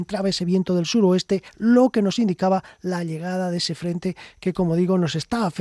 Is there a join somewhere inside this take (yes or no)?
no